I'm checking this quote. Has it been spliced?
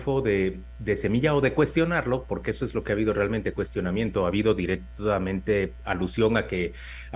no; 0 cuts

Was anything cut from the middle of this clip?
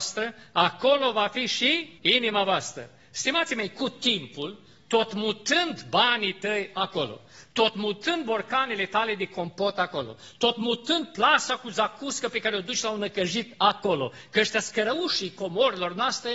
yes; 1 cut; at 2.0 s

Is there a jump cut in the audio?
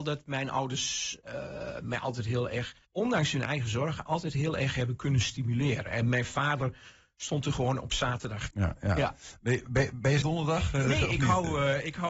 yes; 3 cuts; at 2.8 s, 8.5 s, 10.2 s

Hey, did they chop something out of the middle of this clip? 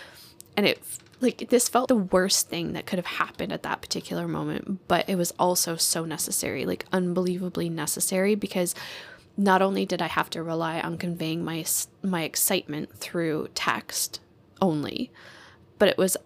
yes; 1 cut; at 1.9 s

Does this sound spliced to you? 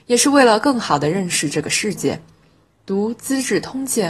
no; 0 cuts

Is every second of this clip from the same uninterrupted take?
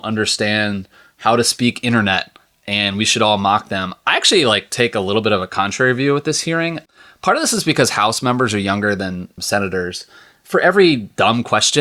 yes; 0 cuts

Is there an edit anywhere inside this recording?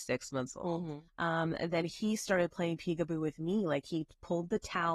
yes; 1 cut; at 1.1 s

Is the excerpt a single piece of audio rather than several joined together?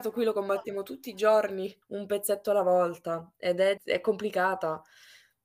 no; 2 cuts; at 1.8 s, 3.8 s

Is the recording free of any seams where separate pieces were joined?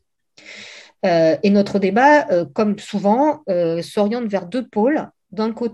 yes; 0 cuts

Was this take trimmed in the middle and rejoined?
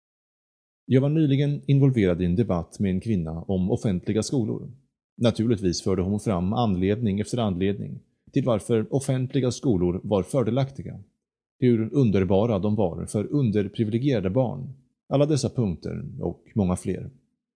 yes; 1 cut; at 15.0 s

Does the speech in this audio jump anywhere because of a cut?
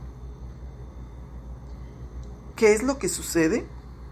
yes; 1 cut; at 2.5 s

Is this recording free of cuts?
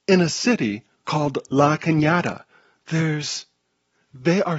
yes; 0 cuts

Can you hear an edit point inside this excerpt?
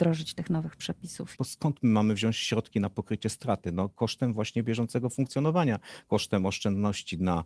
yes; 1 cut; at 1.4 s

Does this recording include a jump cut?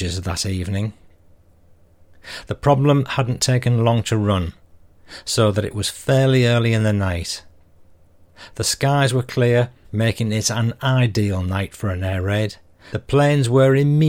yes; 2 cuts; at 9.8 s, 12.9 s

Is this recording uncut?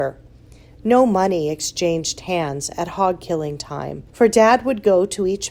no; 1 cut; at 4.1 s

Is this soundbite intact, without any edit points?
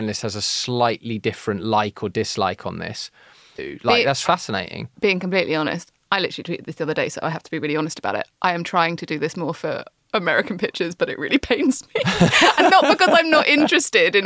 no; 1 cut; at 3.6 s

